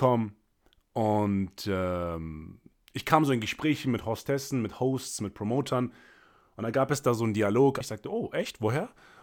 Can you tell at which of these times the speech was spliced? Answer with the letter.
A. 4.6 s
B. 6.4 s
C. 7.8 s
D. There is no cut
C